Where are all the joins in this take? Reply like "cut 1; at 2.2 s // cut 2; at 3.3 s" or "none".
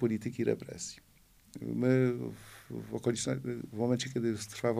none